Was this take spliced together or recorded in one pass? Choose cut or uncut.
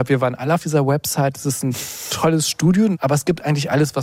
cut